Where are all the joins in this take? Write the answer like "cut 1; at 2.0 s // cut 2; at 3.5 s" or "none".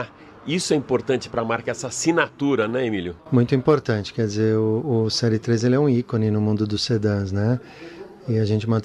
none